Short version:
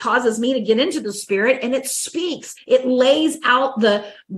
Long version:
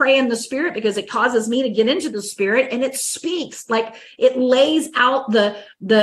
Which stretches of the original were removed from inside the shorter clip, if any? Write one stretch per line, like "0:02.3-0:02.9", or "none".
0:03.7-0:04.1